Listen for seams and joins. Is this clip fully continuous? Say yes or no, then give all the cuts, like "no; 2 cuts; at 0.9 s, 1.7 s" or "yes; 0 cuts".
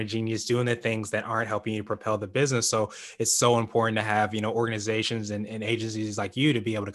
yes; 0 cuts